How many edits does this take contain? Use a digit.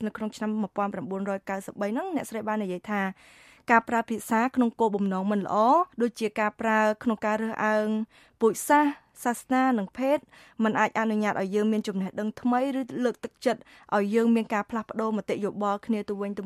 1